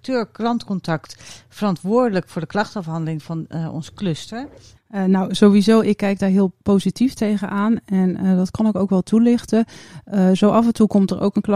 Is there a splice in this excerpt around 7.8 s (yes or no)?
no